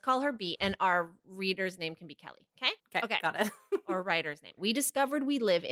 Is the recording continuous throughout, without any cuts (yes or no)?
no